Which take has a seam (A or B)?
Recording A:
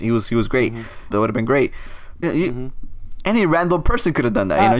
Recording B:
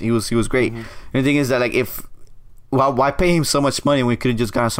A